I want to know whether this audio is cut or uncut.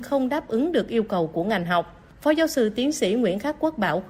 uncut